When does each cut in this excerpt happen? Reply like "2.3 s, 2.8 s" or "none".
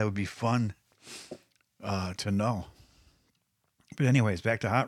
none